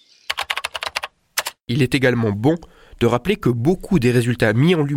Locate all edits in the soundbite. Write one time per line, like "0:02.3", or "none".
0:01.6